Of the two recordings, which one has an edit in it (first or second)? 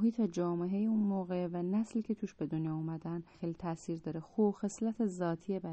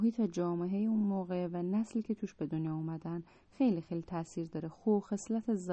first